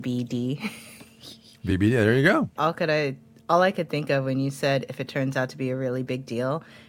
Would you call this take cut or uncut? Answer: cut